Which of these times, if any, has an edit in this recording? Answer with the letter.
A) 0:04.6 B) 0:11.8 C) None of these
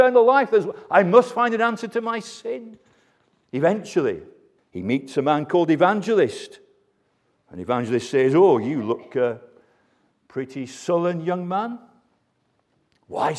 A